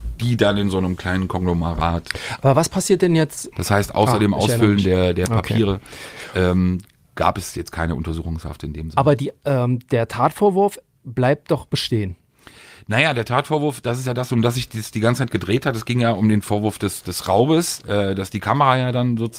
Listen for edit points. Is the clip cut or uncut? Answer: cut